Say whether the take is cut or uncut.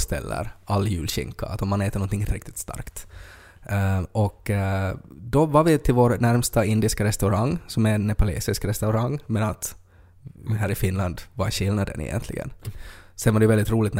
cut